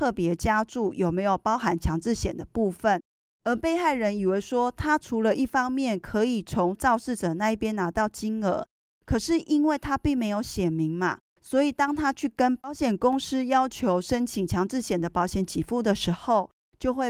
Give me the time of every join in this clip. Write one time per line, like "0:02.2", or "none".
0:08.9